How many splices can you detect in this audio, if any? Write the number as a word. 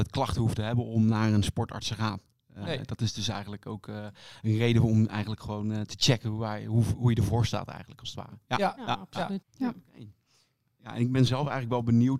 one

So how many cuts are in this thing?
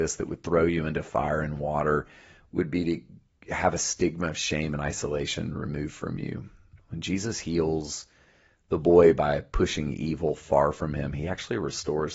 zero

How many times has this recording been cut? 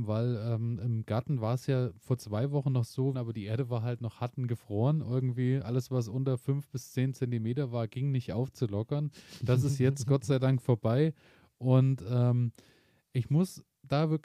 one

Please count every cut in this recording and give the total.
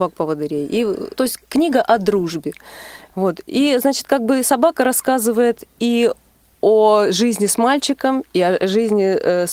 two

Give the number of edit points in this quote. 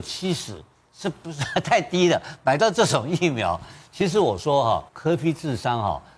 one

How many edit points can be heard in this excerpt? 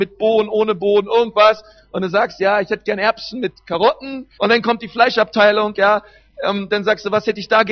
one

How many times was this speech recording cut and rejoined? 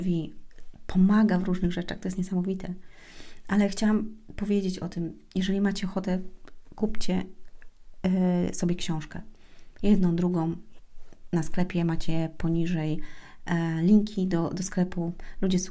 zero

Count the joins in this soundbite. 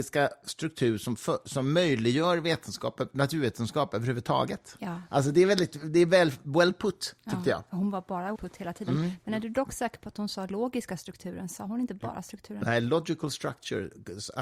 one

